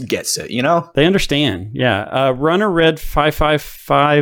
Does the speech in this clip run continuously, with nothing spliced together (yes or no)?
yes